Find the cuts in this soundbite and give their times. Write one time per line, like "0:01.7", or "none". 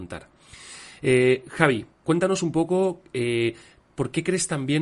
0:01.9